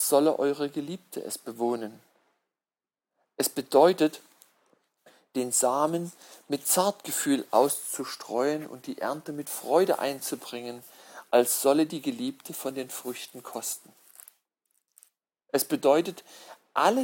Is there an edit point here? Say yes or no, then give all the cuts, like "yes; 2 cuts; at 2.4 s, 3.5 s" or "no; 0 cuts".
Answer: no; 0 cuts